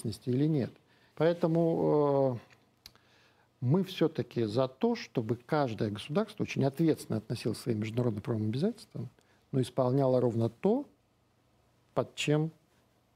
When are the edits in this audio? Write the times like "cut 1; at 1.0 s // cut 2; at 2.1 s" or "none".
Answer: cut 1; at 1.1 s